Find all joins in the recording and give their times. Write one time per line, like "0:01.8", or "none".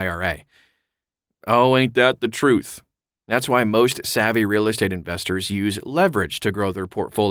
0:01.3